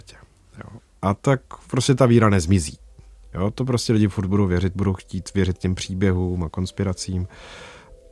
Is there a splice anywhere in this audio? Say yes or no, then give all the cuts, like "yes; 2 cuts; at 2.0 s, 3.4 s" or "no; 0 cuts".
no; 0 cuts